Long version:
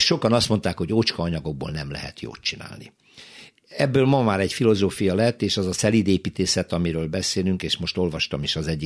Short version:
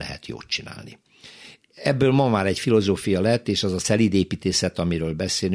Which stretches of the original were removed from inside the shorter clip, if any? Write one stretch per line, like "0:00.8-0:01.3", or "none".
none